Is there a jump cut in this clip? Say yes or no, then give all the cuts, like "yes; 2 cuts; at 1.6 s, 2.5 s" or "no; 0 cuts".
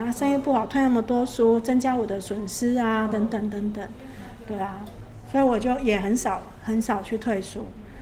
no; 0 cuts